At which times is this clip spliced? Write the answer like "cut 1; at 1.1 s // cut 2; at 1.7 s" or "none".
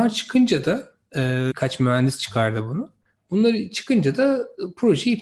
cut 1; at 1.5 s